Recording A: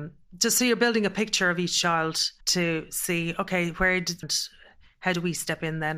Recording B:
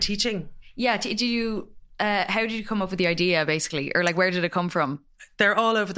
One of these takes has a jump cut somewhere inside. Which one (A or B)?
A